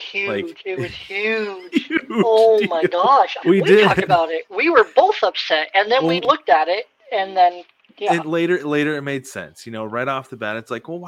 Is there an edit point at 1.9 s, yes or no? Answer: no